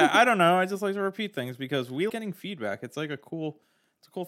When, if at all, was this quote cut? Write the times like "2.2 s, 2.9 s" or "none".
2.1 s